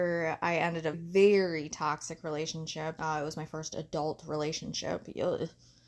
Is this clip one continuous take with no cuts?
no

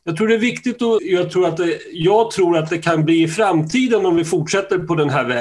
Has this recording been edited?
yes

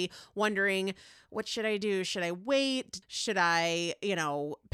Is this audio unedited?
no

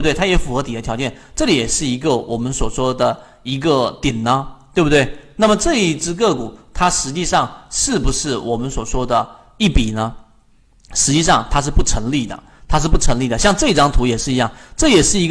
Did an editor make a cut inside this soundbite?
no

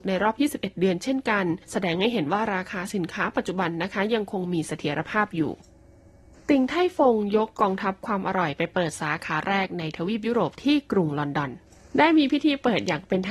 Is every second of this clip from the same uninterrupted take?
yes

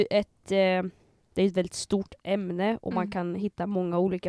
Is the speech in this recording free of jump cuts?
yes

